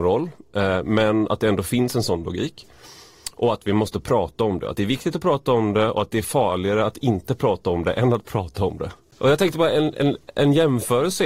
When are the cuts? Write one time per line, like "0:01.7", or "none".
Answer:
none